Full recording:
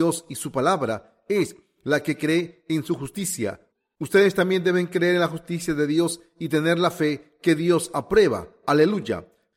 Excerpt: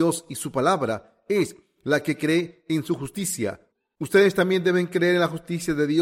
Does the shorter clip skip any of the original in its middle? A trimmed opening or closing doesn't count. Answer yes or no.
no